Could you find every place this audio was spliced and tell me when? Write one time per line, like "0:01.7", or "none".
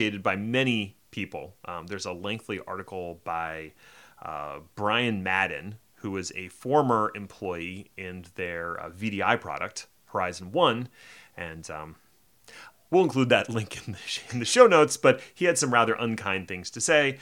none